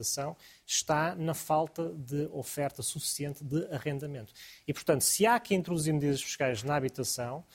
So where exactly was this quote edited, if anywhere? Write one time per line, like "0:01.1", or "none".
none